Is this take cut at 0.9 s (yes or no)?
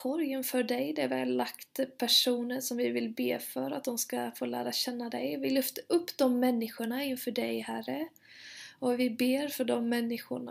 no